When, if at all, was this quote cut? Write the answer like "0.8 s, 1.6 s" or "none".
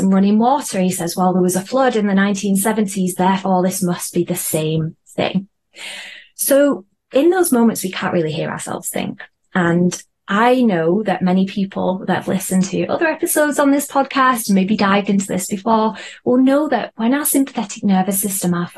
none